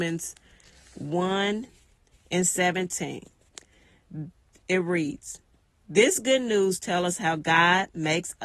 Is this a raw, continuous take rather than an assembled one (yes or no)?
yes